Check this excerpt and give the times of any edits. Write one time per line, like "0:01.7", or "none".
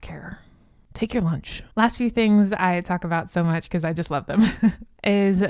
0:01.7